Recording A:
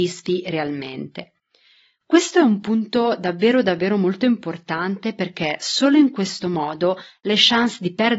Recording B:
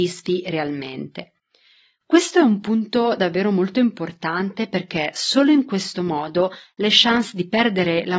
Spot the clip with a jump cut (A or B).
B